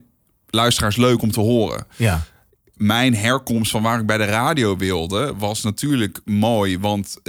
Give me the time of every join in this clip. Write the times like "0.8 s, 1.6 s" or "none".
none